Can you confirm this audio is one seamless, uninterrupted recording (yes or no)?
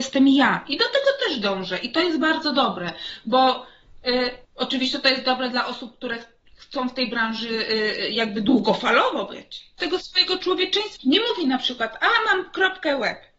no